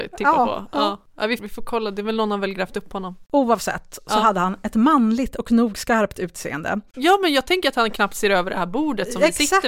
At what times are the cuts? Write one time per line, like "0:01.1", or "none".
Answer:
0:01.4
0:06.9